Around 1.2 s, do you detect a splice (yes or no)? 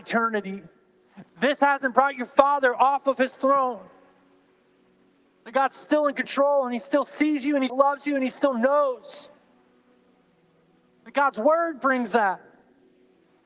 yes